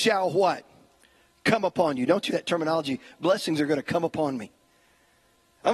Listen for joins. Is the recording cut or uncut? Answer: cut